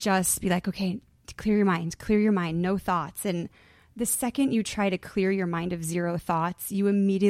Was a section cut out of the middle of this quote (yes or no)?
no